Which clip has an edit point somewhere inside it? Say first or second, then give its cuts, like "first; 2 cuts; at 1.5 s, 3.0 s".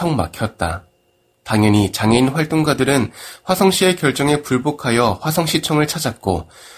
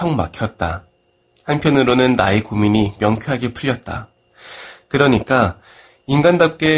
first; 1 cut; at 1.3 s